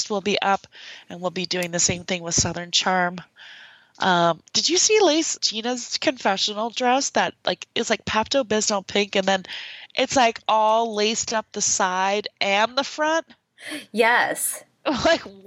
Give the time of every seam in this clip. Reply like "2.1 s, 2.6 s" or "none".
5.4 s